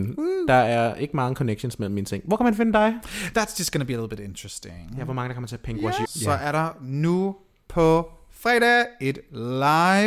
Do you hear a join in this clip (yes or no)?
yes